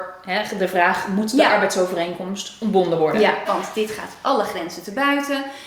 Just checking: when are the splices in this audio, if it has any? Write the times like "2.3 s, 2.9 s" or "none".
3.5 s